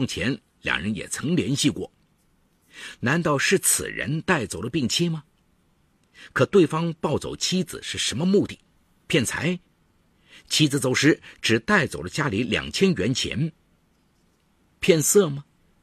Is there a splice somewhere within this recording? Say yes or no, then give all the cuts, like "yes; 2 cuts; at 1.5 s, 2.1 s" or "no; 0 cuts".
no; 0 cuts